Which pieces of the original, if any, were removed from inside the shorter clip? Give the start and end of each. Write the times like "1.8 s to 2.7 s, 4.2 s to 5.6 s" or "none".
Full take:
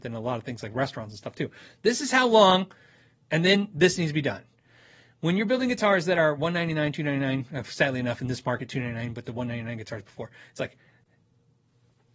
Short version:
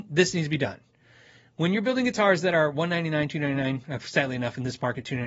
none